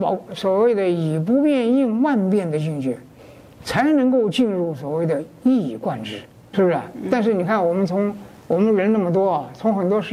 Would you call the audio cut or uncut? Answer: cut